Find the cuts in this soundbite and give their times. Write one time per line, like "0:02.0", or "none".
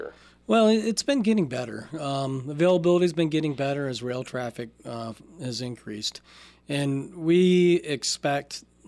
none